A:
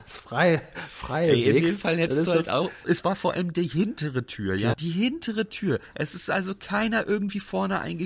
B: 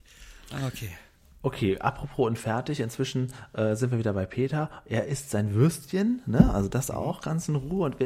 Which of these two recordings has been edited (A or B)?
A